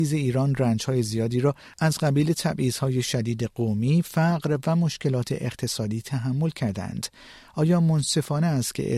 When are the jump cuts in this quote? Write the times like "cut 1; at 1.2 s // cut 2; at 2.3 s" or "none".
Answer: cut 1; at 4.0 s